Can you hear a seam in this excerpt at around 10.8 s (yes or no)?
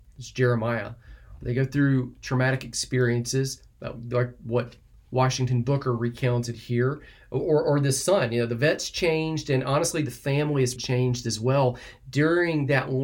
yes